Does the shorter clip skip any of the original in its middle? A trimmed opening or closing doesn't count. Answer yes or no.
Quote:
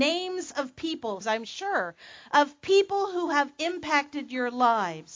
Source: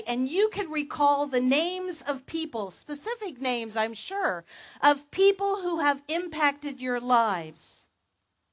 yes